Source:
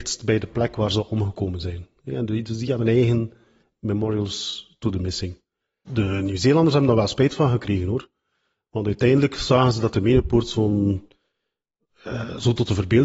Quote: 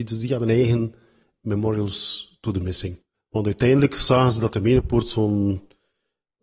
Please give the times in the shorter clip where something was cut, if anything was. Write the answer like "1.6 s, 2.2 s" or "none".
3.1 s